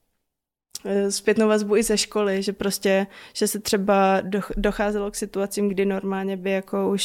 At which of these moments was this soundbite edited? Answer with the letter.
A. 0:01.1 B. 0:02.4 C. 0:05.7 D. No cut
C